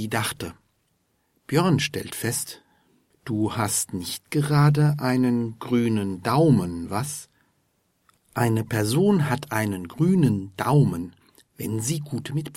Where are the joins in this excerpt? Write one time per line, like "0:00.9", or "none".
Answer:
none